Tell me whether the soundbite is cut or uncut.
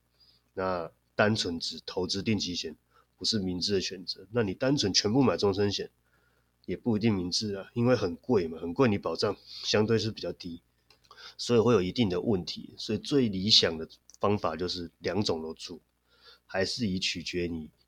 uncut